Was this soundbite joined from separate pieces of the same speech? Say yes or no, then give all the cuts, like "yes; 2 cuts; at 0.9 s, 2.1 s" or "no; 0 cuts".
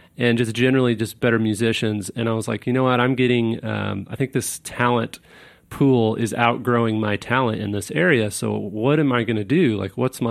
no; 0 cuts